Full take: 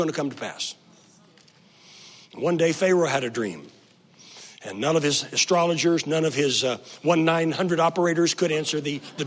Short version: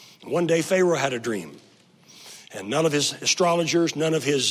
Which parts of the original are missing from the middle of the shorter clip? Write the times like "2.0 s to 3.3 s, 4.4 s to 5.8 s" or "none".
none